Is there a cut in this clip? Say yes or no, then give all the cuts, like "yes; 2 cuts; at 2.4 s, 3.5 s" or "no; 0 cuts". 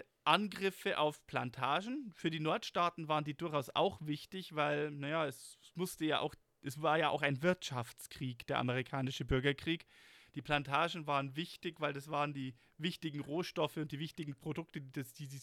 no; 0 cuts